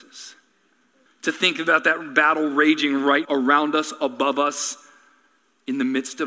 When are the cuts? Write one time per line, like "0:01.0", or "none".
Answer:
0:01.1
0:03.3

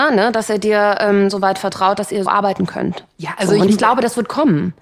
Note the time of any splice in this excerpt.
0:02.3

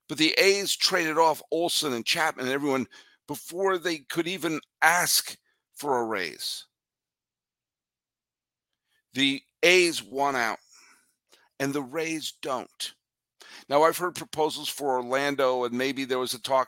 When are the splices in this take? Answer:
none

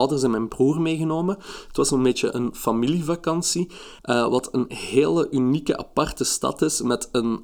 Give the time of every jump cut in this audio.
0:04.0

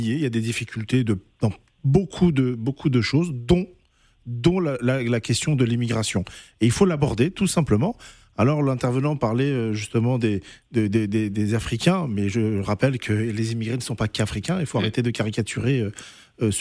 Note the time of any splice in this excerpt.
none

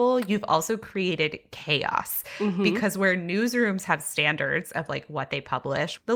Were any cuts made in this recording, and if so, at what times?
none

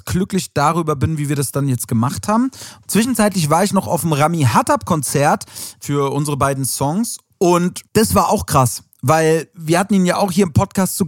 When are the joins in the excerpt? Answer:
0:02.9
0:07.9

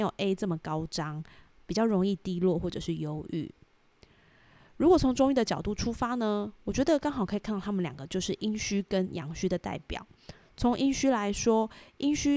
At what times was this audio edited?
none

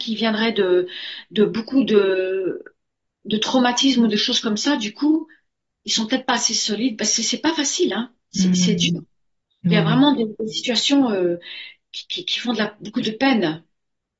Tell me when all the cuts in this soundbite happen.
none

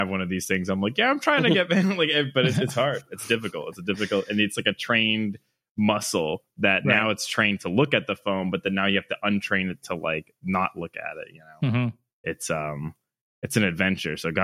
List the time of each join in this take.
none

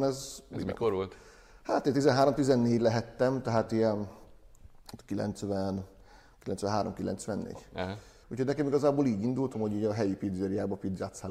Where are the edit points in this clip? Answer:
0:08.2
0:09.5

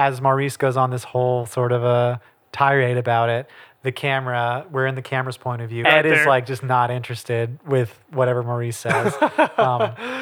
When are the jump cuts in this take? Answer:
0:05.8

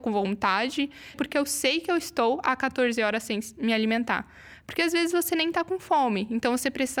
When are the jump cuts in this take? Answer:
0:01.1

